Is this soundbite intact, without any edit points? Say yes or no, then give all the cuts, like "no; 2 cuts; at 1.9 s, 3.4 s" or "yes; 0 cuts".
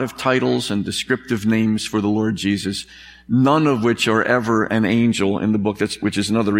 yes; 0 cuts